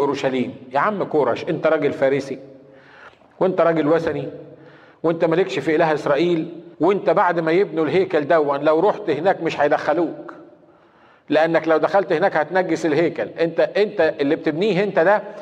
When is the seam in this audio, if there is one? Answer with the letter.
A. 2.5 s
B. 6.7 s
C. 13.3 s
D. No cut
B